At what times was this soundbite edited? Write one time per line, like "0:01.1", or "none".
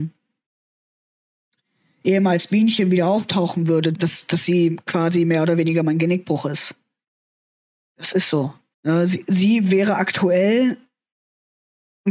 0:03.9
0:08.7